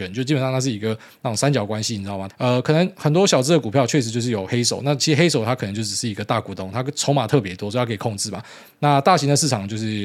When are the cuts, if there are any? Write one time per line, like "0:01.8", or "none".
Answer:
0:02.3